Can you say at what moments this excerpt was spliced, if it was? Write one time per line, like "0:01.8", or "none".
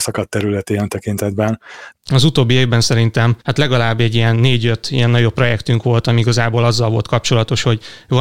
0:01.9
0:03.4